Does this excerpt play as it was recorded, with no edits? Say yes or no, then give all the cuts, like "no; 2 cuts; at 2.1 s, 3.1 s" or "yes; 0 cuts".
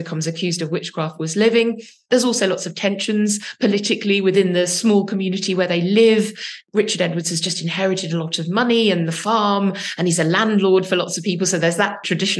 yes; 0 cuts